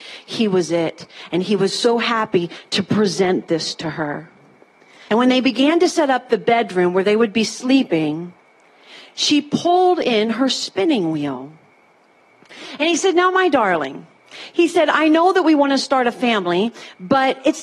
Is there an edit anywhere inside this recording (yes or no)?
yes